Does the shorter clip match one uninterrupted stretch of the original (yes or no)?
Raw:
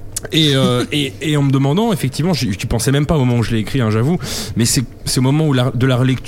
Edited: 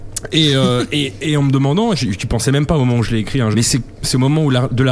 no